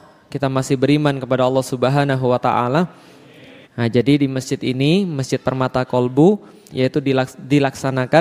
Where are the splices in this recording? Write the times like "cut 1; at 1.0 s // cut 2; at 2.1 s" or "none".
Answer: cut 1; at 3.6 s // cut 2; at 6.7 s